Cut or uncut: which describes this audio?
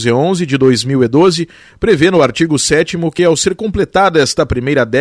uncut